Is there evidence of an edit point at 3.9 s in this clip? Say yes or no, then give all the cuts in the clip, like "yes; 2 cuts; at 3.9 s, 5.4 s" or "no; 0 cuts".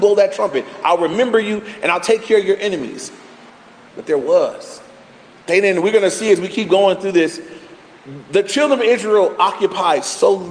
yes; 1 cut; at 3.9 s